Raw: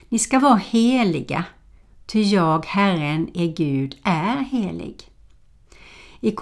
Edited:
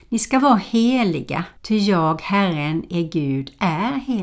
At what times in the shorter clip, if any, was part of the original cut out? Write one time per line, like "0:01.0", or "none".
0:01.6